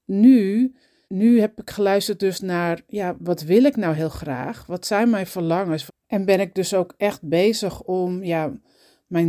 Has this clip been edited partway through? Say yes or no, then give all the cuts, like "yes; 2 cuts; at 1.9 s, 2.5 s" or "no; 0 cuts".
yes; 2 cuts; at 1.0 s, 5.9 s